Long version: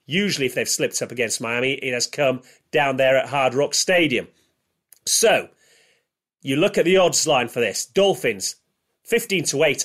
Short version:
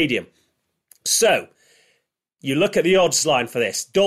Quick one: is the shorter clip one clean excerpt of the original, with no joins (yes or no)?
yes